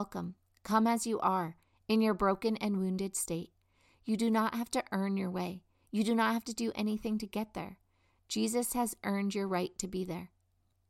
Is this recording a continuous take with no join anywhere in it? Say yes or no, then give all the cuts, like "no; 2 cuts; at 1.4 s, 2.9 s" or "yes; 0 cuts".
yes; 0 cuts